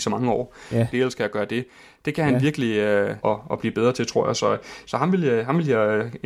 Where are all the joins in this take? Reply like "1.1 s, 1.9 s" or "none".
0.9 s, 3.2 s

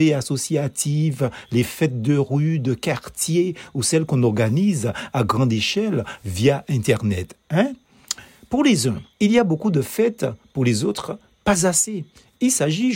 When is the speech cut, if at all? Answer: 9.1 s

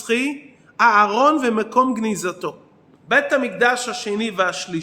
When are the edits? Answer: 3.0 s

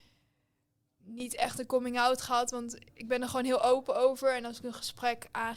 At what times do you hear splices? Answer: none

